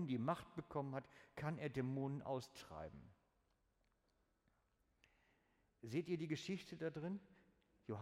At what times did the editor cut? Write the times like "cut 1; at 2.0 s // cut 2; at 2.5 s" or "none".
none